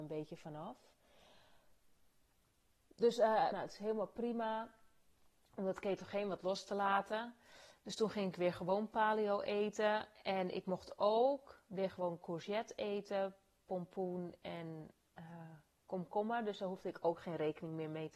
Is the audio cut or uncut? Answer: cut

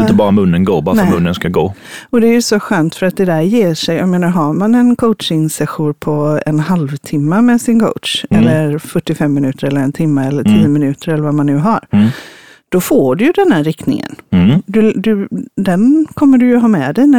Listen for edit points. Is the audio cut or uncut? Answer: uncut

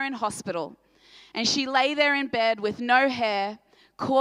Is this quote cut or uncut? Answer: uncut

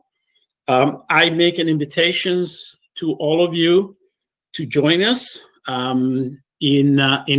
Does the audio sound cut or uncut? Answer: uncut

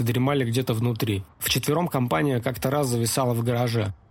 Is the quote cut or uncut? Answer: cut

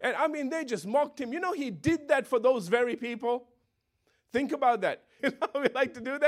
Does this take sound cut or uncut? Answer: cut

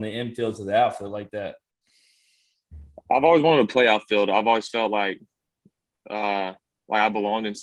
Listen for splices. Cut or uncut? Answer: uncut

